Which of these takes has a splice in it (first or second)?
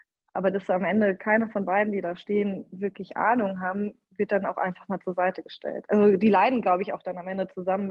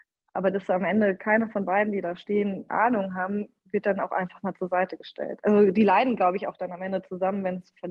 second